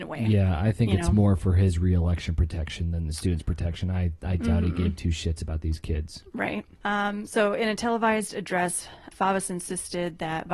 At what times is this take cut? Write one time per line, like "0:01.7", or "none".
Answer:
0:06.8
0:09.1